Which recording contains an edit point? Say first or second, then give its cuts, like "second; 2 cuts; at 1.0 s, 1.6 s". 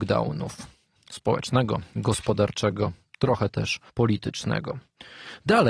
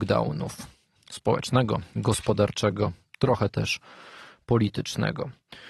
first; 1 cut; at 3.9 s